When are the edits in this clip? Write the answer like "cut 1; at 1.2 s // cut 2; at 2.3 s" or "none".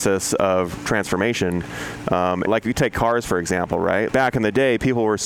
cut 1; at 2.5 s // cut 2; at 4.1 s